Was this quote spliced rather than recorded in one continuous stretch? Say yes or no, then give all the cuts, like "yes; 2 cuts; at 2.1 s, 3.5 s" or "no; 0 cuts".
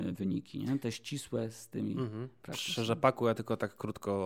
no; 0 cuts